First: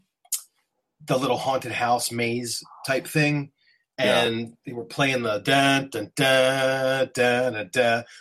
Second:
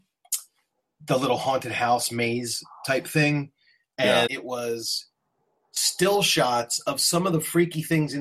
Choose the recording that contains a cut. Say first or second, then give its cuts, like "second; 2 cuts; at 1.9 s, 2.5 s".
second; 1 cut; at 4.3 s